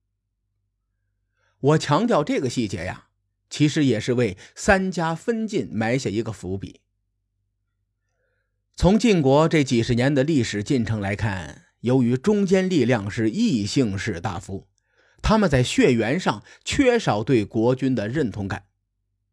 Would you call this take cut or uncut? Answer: uncut